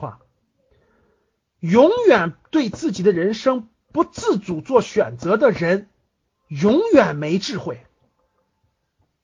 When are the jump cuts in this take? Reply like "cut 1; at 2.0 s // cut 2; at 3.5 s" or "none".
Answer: none